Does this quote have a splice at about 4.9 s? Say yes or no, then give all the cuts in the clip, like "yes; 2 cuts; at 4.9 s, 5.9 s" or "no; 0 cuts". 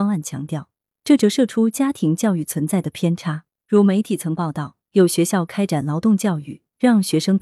no; 0 cuts